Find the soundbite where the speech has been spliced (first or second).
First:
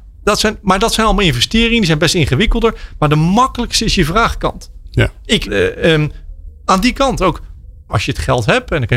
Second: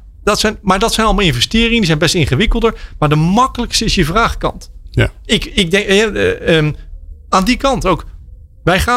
first